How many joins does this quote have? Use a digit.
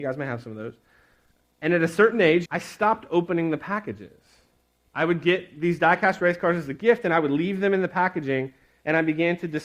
1